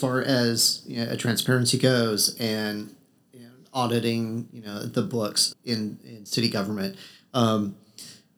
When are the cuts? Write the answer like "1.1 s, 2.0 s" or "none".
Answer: 5.5 s